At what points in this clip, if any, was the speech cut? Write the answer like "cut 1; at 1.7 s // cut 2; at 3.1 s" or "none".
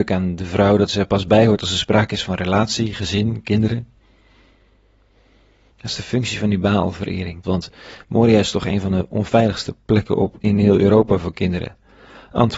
cut 1; at 7.4 s // cut 2; at 10.4 s